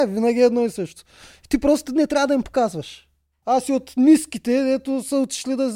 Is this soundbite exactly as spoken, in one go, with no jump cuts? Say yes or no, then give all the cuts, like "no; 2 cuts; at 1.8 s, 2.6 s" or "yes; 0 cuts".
no; 1 cut; at 3.4 s